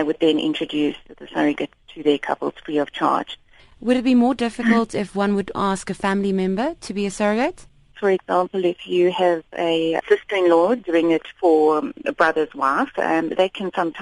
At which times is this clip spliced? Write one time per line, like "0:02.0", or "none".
0:07.9